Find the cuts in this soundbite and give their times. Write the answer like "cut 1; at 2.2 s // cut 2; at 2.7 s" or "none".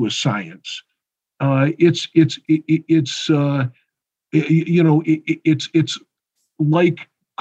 none